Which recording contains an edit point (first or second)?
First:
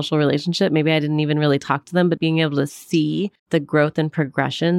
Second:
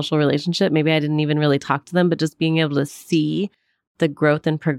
first